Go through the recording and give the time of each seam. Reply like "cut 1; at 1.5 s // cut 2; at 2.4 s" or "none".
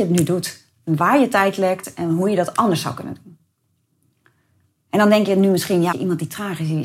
cut 1; at 5.9 s